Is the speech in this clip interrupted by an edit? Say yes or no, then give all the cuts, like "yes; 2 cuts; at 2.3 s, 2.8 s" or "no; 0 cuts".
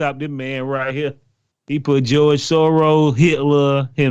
yes; 1 cut; at 1.5 s